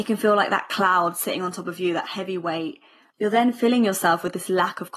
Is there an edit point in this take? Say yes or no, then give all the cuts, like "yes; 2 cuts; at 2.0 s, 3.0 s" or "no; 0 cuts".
yes; 1 cut; at 3.1 s